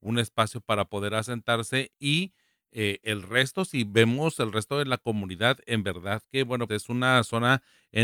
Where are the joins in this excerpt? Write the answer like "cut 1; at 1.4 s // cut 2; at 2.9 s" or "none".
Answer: cut 1; at 6.7 s